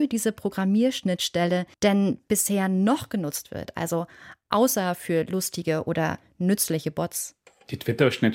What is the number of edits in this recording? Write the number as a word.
one